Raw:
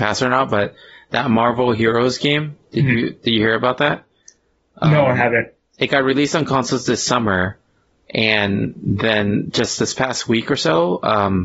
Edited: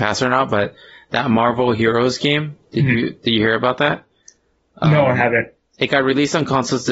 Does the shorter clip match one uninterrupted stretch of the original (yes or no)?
yes